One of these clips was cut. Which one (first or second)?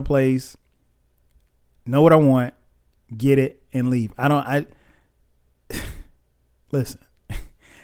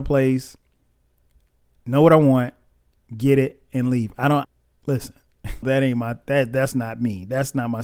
second